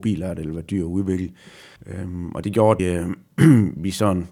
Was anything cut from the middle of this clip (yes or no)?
yes